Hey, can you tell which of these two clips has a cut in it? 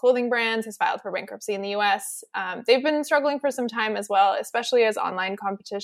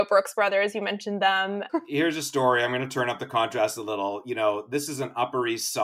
second; 1 cut; at 1.7 s

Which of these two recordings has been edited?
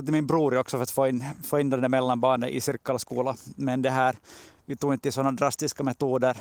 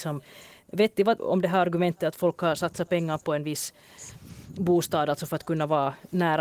second; 1 cut; at 1.2 s

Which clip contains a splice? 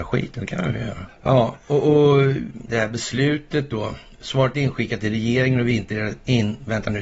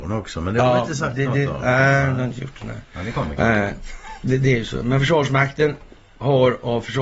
first; 2 cuts; at 1.1 s, 2.7 s

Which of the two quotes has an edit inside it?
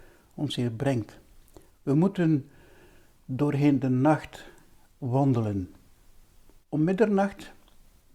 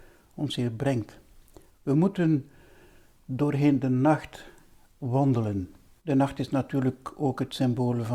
second; 1 cut; at 6.0 s

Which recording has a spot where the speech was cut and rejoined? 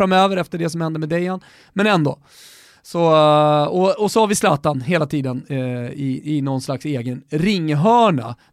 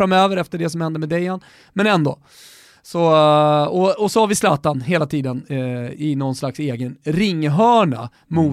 second; 1 cut; at 5.9 s

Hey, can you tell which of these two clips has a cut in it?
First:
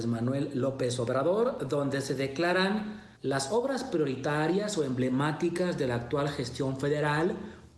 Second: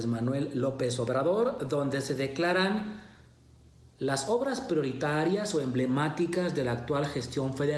first; 1 cut; at 3.2 s

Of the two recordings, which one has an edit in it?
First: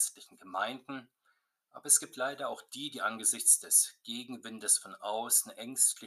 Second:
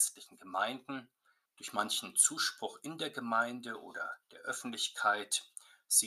second; 1 cut; at 1.5 s

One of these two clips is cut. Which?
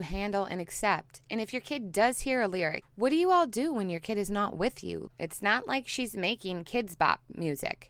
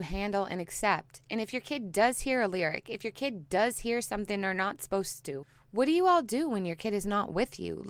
first; 2 cuts; at 2.8 s, 5.1 s

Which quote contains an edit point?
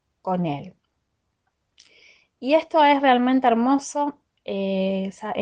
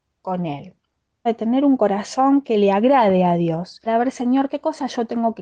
second; 2 cuts; at 1.3 s, 3.9 s

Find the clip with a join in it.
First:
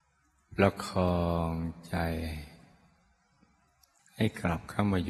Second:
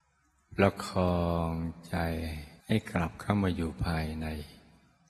second; 1 cut; at 2.6 s

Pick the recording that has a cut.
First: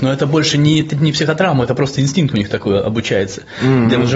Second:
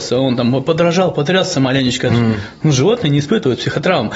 second; 1 cut; at 2.1 s

